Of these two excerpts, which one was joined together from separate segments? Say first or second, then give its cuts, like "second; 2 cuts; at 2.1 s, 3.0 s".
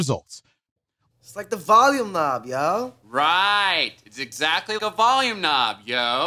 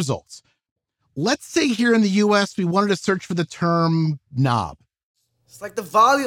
first; 3 cuts; at 1.1 s, 3.0 s, 4.8 s